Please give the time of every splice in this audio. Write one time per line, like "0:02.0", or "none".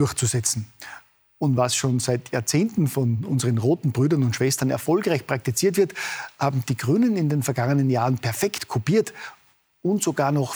none

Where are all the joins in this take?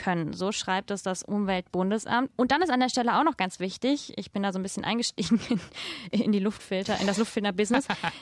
0:02.3

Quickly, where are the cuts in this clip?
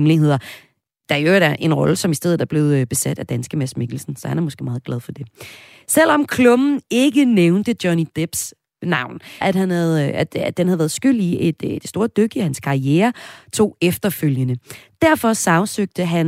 0:09.4

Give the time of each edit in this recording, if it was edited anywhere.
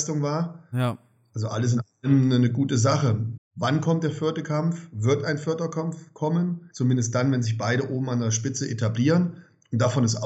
0:03.4
0:06.7

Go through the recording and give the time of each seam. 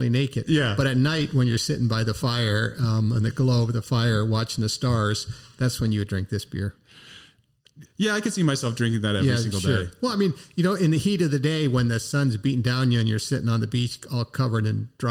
0:07.9

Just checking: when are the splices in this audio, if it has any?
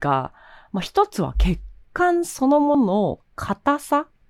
0:02.7

